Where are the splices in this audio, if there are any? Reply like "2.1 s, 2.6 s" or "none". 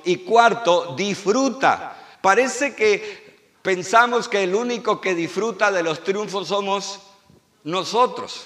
2.1 s